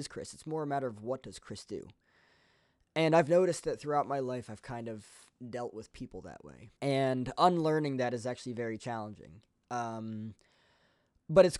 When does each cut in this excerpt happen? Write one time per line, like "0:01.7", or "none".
0:06.8